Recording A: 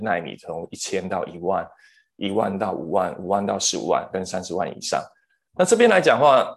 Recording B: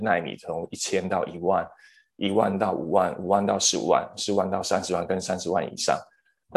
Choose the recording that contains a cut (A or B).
A